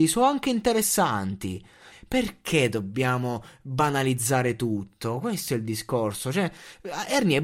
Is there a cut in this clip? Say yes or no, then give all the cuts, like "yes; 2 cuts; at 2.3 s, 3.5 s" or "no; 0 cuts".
yes; 1 cut; at 1.9 s